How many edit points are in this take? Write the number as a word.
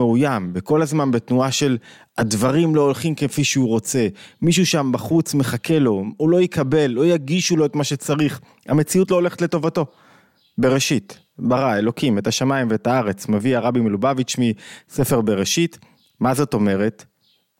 zero